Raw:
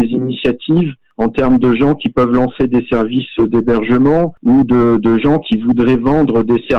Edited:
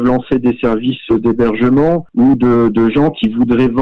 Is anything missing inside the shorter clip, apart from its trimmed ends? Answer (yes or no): no